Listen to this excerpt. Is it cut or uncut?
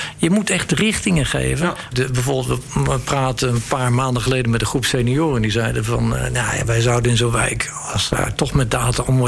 cut